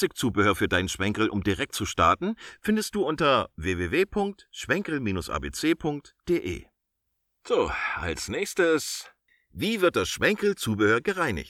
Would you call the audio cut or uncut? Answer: uncut